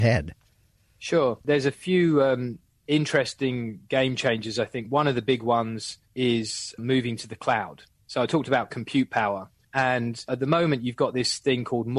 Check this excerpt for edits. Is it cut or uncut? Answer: uncut